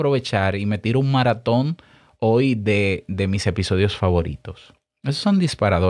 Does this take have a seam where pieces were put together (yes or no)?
no